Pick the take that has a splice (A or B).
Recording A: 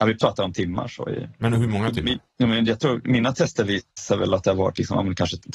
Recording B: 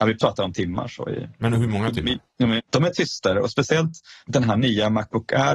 B